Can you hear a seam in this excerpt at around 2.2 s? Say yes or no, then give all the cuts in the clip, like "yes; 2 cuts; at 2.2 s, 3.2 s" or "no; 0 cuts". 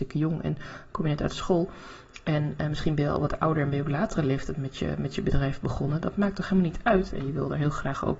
no; 1 cut; at 7.1 s